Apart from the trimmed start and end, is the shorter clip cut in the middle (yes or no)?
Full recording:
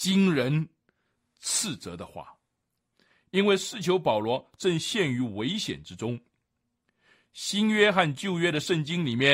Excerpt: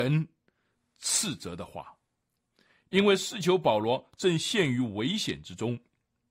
no